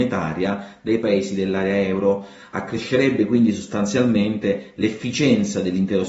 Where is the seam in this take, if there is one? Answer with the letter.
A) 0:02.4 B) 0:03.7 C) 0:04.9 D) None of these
D